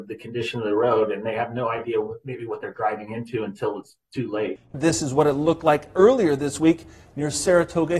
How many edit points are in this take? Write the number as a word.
one